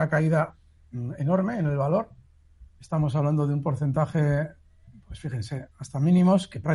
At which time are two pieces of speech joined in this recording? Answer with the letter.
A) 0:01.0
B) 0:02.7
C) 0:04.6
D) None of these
D